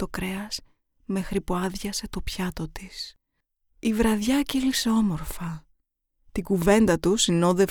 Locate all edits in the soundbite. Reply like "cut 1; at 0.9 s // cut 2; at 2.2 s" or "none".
none